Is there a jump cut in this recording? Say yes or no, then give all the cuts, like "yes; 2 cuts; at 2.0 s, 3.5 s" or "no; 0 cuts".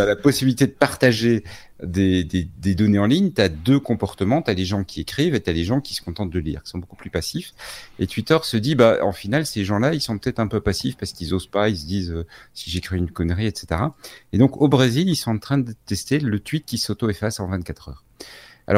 no; 0 cuts